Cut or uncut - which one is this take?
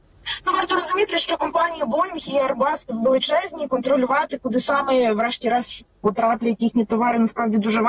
uncut